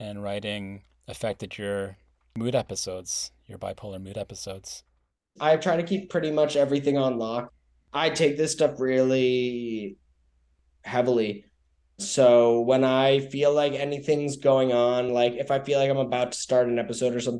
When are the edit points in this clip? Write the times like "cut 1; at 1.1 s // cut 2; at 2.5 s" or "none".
none